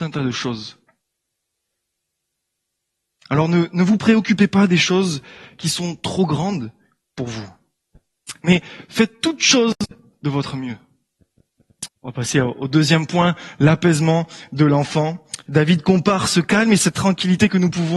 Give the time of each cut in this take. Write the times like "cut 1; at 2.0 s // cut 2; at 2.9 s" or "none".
cut 1; at 11.9 s

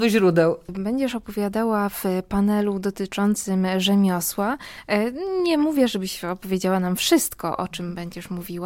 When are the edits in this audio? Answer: none

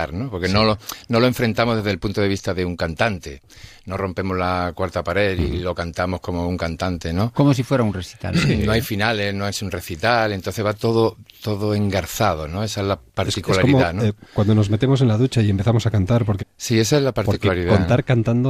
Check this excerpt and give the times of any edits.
cut 1; at 4.0 s // cut 2; at 16.4 s

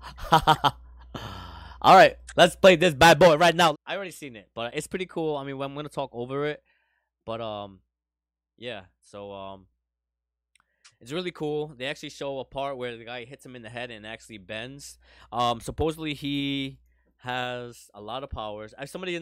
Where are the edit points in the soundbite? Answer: cut 1; at 3.7 s

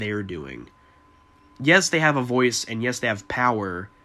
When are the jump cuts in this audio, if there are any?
none

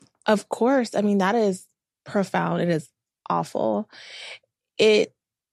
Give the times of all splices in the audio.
none

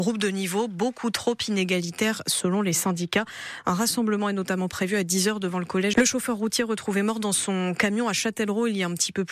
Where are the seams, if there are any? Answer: cut 1; at 5.9 s

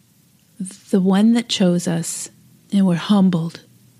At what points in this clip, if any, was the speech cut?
cut 1; at 2.6 s

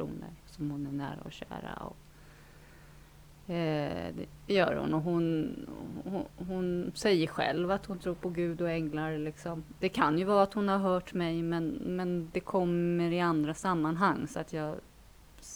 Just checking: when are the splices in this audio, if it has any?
none

